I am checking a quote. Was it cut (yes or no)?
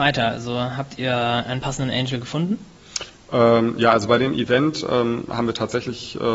no